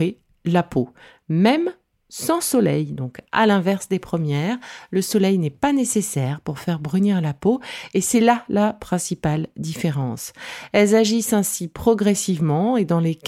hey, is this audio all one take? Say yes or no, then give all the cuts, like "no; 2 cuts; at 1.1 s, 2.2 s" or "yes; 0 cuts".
yes; 0 cuts